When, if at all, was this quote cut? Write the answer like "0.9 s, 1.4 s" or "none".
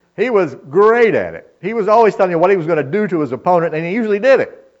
none